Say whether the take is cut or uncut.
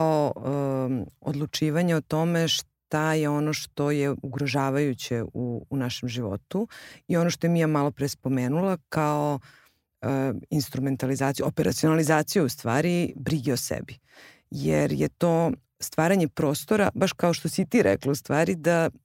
uncut